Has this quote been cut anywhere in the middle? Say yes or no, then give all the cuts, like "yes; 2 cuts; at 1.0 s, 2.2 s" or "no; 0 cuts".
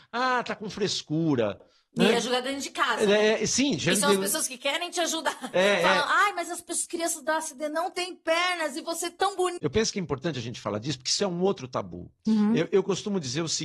yes; 1 cut; at 9.6 s